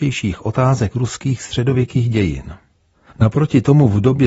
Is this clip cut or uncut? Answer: cut